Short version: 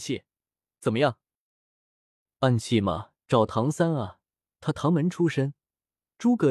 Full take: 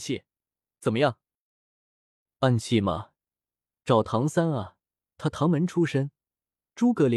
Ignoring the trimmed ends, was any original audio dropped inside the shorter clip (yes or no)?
yes